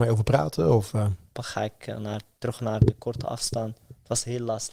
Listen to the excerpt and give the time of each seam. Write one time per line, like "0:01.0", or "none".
0:01.4